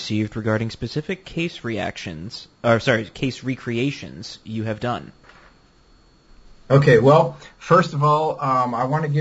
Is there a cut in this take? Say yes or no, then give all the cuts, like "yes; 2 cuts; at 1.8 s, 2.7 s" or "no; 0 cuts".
no; 0 cuts